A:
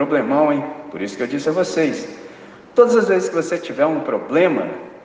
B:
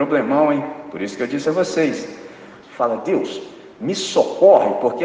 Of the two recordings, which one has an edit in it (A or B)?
B